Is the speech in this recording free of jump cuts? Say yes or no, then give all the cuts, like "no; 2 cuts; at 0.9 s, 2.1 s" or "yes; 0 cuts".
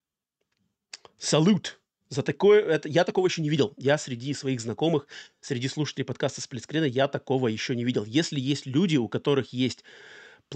yes; 0 cuts